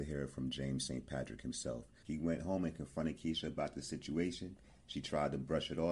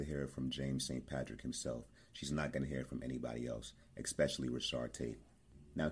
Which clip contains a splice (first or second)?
first